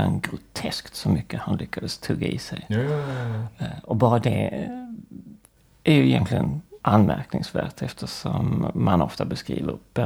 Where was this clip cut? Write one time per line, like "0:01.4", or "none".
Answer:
0:06.8